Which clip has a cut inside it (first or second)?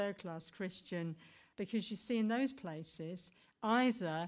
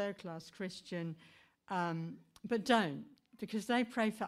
first